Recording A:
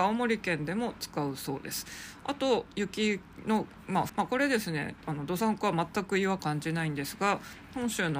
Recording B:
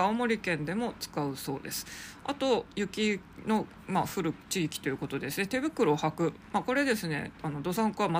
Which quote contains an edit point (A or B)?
A